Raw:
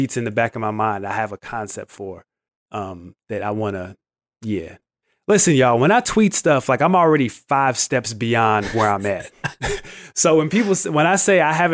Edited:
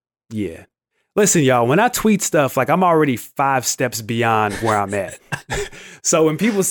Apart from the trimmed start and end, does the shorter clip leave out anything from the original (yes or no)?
no